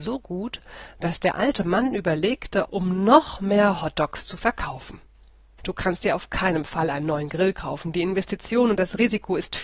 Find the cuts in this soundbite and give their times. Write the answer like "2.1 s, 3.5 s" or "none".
2.6 s, 5.6 s

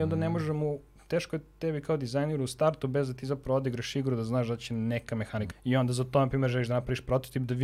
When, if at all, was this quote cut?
5.5 s

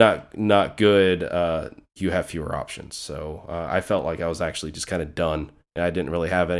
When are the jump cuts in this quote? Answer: 2.0 s

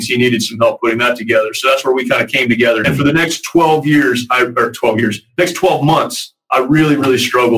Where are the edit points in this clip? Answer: 2.8 s

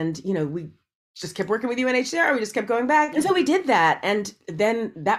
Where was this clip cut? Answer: 3.1 s

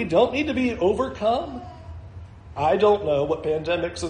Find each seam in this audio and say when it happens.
2.6 s

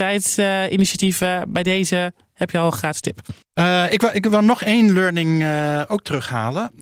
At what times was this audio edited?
3.4 s

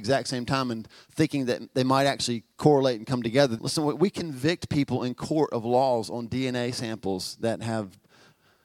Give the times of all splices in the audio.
3.6 s

